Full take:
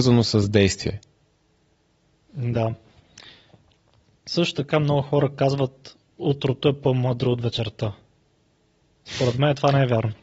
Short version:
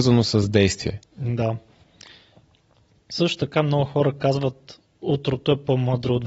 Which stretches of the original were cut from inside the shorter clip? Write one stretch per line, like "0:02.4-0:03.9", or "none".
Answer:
0:01.1-0:02.2